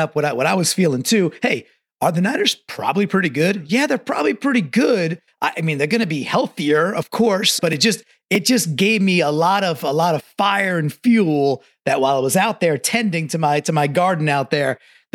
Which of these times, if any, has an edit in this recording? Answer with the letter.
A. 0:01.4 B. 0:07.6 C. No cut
B